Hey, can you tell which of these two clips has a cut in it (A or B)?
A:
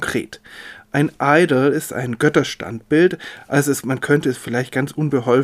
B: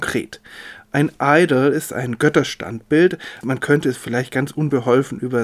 B